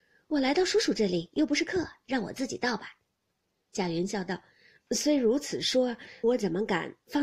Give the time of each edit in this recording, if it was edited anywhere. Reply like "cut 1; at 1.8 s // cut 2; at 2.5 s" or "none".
cut 1; at 3.3 s // cut 2; at 6.2 s